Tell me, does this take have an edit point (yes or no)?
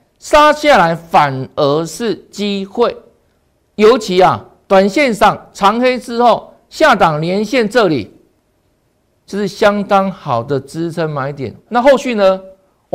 yes